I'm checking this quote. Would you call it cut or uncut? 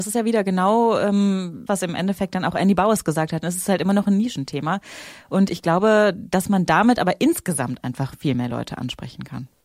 cut